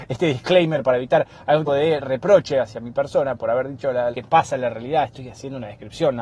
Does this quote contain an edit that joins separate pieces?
yes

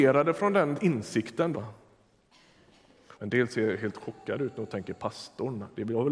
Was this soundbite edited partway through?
yes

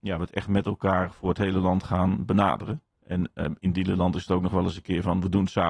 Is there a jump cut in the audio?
yes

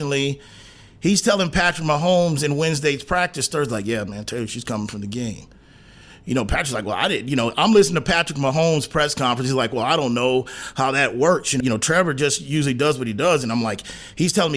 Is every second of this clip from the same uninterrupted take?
no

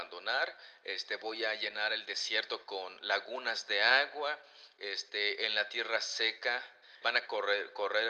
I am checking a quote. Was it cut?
yes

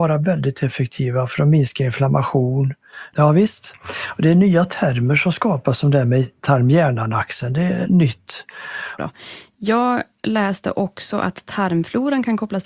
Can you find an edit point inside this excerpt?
yes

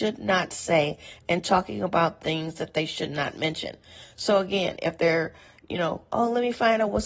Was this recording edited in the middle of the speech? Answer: no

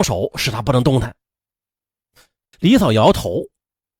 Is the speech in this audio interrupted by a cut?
yes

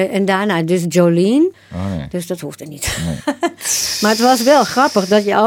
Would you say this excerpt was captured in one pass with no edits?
no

